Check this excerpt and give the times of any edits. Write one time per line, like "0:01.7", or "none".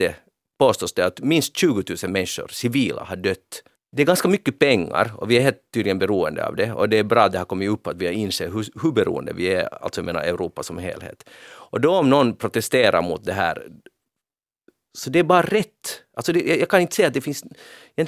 0:03.7